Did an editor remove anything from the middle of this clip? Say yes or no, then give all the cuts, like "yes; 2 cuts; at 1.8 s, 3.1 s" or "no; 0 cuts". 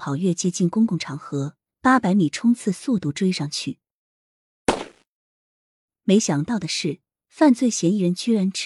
yes; 1 cut; at 1.7 s